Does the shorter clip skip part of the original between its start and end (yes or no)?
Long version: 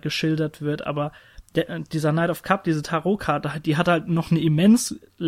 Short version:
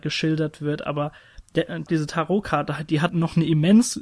yes